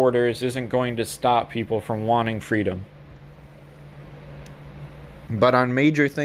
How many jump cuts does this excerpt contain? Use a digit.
1